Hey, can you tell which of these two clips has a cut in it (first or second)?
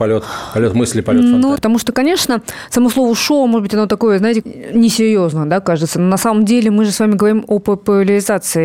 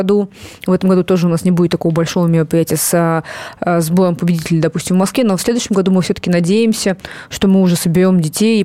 first